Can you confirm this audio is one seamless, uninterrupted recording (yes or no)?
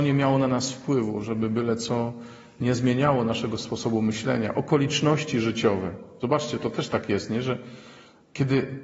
yes